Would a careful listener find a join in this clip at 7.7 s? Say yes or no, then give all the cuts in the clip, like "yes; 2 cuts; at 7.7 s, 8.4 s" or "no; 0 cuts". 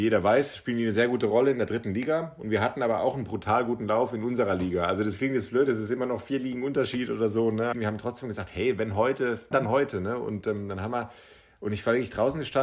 yes; 2 cuts; at 7.7 s, 9.5 s